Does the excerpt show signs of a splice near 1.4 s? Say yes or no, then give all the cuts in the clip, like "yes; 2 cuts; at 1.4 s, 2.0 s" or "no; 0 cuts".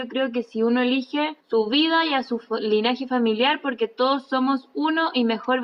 yes; 1 cut; at 1.4 s